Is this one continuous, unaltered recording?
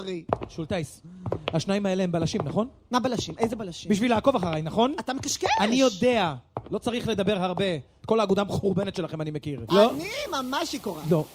no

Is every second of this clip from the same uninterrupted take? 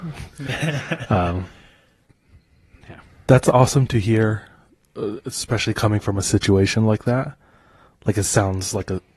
yes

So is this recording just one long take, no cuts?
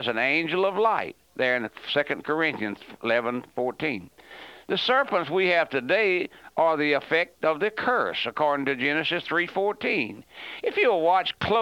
no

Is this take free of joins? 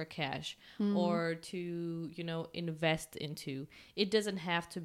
yes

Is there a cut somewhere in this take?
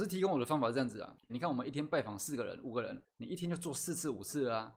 yes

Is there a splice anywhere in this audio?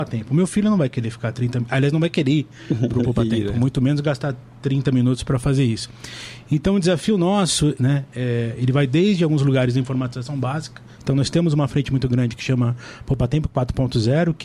yes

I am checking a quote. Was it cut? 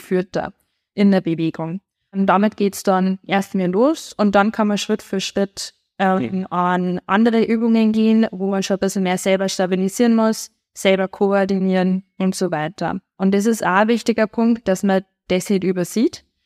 no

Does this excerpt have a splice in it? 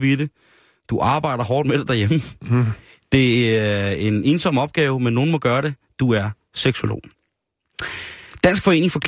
no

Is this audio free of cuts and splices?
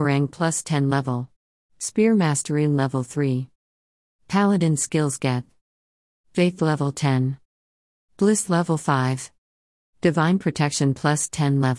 no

